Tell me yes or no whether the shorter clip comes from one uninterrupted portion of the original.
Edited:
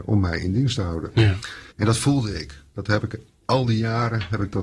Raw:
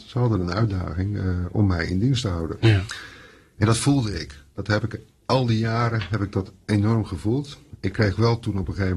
no